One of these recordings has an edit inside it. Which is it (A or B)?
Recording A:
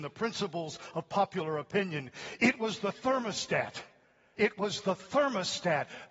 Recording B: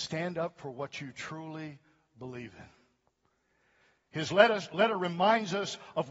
A